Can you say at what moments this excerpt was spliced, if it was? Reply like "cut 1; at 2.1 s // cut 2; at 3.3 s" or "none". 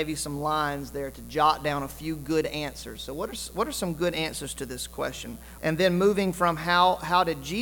cut 1; at 5.6 s